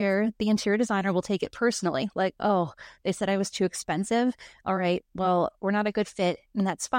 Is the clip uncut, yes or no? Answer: yes